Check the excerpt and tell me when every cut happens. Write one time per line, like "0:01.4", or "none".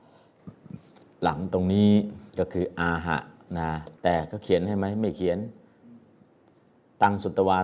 0:02.3
0:04.0